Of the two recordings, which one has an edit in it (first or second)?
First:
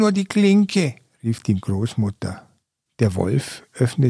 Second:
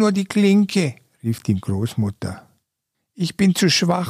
first